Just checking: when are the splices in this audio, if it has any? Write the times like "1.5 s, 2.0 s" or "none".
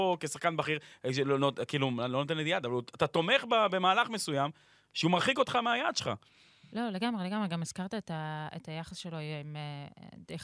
none